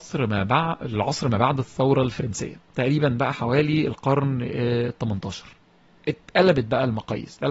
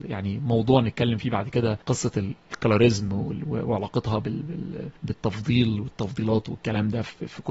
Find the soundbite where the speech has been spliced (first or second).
second